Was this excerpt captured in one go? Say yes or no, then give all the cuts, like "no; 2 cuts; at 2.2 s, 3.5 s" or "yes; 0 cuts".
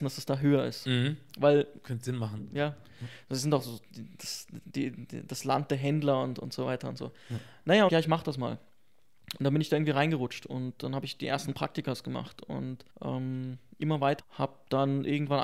no; 3 cuts; at 7.9 s, 12.9 s, 14.2 s